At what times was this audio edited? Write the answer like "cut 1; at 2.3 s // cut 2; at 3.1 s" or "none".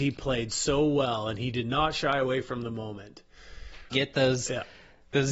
cut 1; at 3.9 s

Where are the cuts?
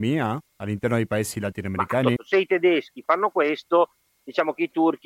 cut 1; at 2.2 s

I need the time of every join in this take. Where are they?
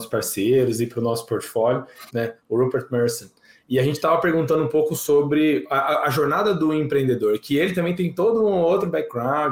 cut 1; at 2.1 s

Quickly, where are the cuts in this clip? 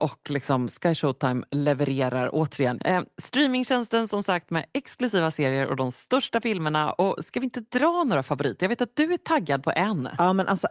cut 1; at 2.8 s

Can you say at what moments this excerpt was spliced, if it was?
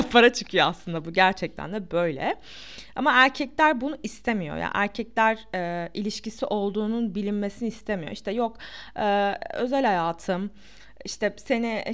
none

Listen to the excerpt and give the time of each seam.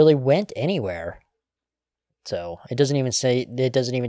none

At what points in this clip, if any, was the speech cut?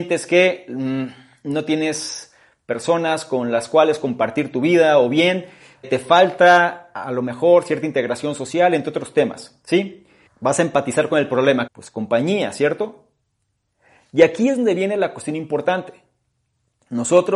cut 1; at 5.8 s // cut 2; at 10.3 s // cut 3; at 11.7 s

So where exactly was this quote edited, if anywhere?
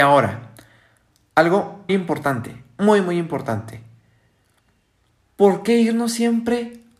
cut 1; at 1.9 s

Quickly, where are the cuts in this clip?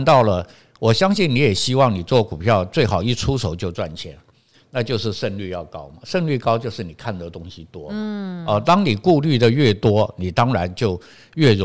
none

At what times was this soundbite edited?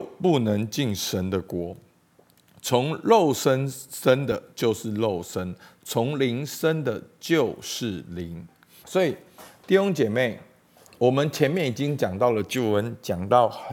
cut 1; at 8.8 s

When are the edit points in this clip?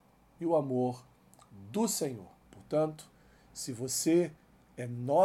cut 1; at 2.4 s

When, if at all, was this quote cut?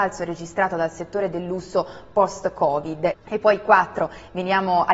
cut 1; at 3.1 s

